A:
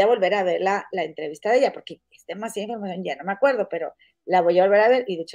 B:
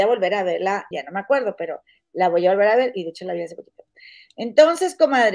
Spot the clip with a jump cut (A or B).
B